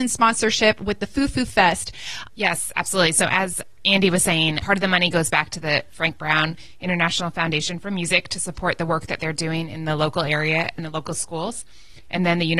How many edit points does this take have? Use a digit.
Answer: 2